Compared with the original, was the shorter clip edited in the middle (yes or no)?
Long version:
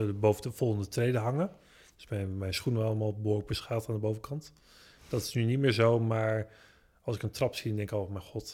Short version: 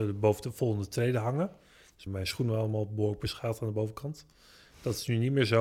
yes